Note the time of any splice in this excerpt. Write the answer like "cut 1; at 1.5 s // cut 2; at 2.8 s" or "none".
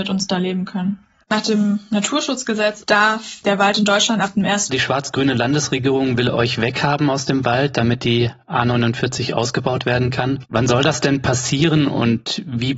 cut 1; at 1.2 s // cut 2; at 4.7 s